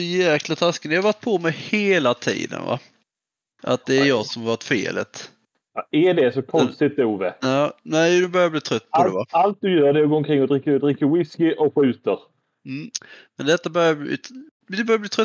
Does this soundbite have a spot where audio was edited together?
no; 0 cuts

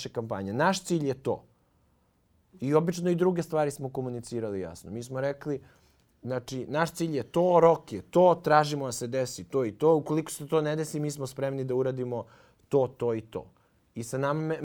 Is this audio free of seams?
yes; 0 cuts

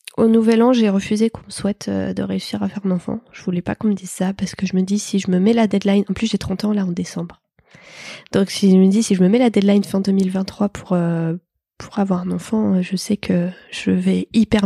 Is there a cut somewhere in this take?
no; 0 cuts

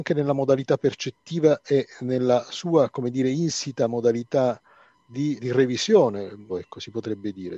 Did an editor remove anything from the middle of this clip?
yes; 2 cuts; at 5.4 s, 6.5 s

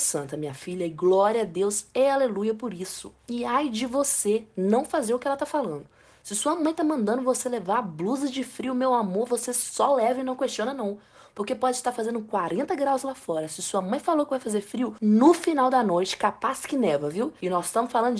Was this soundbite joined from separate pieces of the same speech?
no; 0 cuts

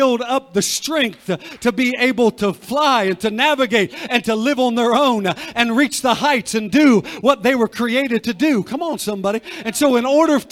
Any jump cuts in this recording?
no; 0 cuts

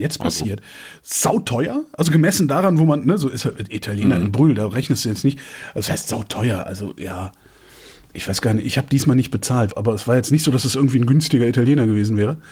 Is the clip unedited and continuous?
no; 1 cut; at 9.7 s

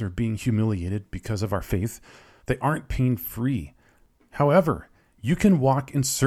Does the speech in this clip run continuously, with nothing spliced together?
no; 1 cut; at 2.4 s

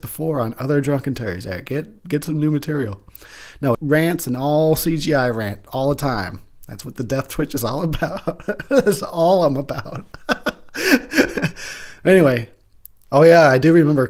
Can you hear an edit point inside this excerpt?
yes; 1 cut; at 3.7 s

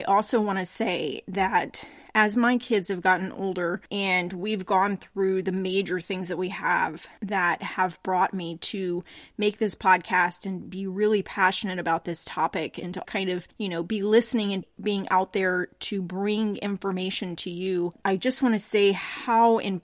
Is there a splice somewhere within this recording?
yes; 1 cut; at 13.0 s

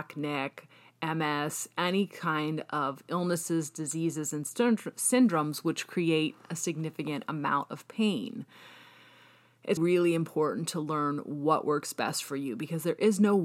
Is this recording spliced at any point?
yes; 1 cut; at 9.8 s

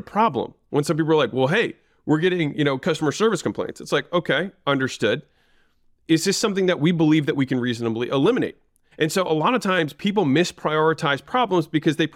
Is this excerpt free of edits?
no; 1 cut; at 8.9 s

